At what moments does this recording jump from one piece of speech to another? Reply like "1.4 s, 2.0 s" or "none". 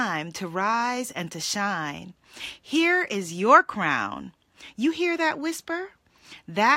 none